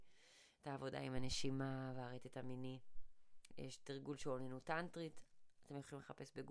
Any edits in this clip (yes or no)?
yes